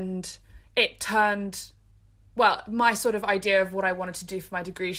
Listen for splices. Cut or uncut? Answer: uncut